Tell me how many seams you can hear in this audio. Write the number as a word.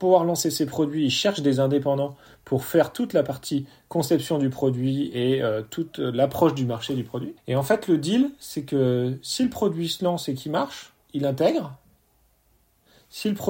two